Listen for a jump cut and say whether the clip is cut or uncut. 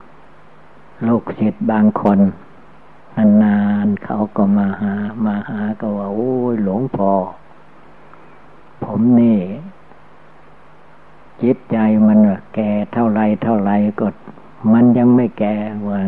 uncut